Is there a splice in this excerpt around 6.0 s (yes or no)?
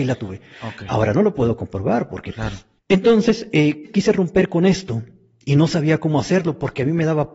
no